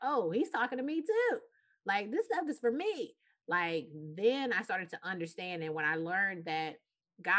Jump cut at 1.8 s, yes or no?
no